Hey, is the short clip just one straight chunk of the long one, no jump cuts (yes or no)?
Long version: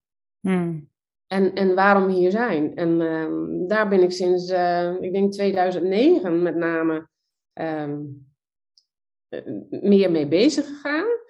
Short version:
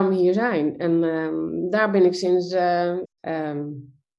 no